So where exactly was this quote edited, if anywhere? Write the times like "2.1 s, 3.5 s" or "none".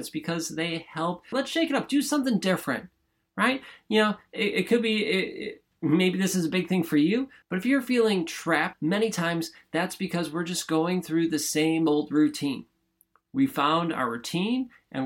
1.3 s, 7.4 s, 8.7 s